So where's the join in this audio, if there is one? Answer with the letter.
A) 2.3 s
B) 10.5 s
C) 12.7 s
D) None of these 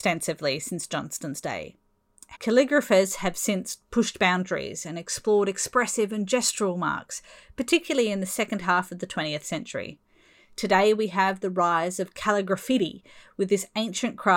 A